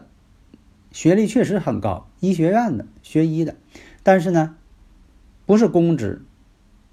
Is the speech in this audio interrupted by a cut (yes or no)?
no